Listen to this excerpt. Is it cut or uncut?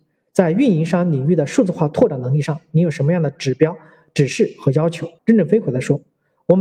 cut